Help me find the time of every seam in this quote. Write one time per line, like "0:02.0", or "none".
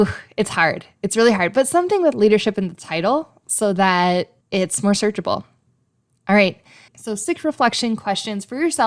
0:04.4
0:06.9